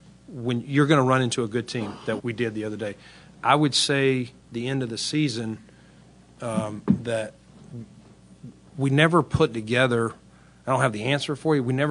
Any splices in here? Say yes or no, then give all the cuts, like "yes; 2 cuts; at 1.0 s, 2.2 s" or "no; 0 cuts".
yes; 1 cut; at 2.2 s